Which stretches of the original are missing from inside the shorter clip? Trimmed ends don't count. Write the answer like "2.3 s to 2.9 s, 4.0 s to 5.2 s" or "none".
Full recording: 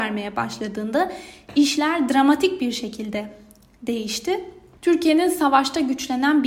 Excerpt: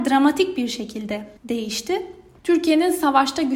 3.4 s to 3.7 s